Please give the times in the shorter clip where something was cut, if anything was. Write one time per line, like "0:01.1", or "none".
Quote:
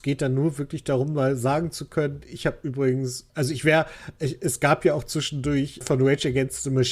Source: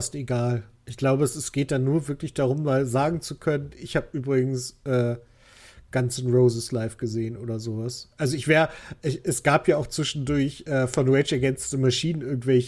0:03.3
0:05.8